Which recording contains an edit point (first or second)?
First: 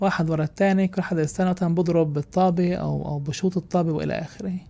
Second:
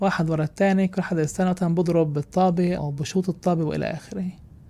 second